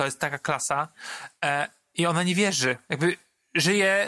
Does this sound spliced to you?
no; 0 cuts

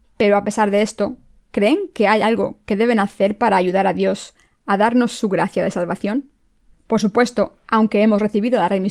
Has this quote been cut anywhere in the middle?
yes; 1 cut; at 6.7 s

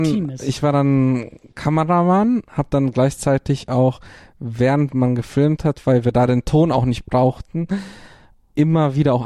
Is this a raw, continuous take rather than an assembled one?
yes; 0 cuts

